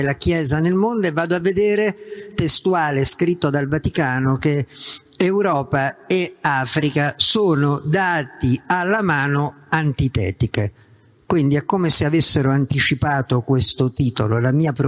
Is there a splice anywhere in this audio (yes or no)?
no